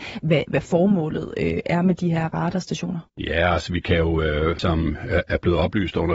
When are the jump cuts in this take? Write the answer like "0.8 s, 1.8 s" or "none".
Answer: 3.1 s, 4.6 s